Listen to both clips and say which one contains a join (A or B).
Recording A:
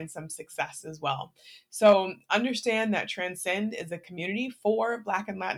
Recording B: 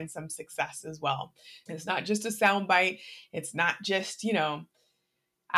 B